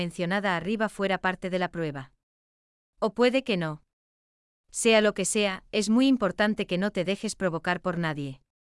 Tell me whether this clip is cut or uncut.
uncut